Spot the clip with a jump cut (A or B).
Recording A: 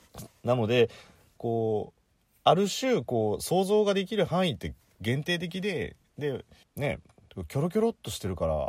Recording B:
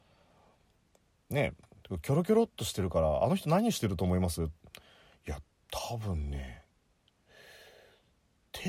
A